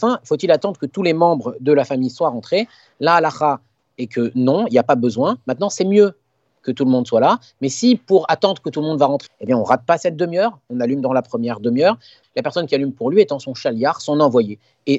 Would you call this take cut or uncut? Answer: cut